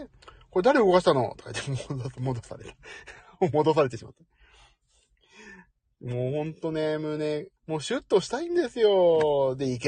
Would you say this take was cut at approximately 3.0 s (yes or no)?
no